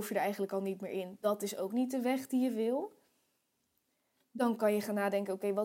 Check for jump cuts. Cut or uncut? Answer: uncut